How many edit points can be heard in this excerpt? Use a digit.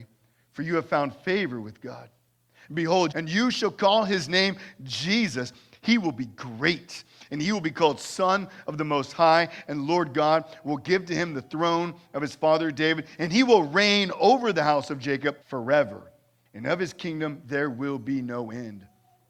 2